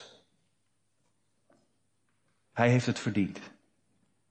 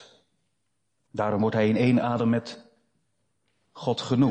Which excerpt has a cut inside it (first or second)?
second